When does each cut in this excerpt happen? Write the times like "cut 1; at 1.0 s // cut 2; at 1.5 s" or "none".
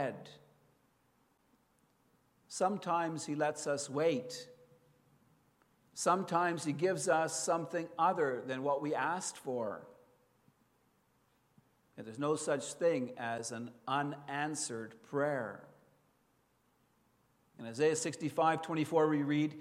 none